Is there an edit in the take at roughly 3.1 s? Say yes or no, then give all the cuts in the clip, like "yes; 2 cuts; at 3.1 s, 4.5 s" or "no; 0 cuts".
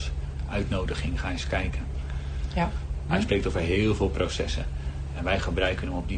yes; 1 cut; at 3.1 s